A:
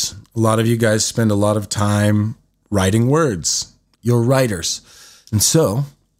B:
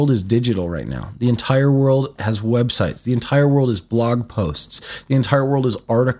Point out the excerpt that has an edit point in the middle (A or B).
A